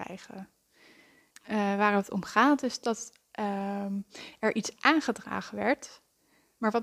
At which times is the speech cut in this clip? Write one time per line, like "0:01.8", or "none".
0:01.3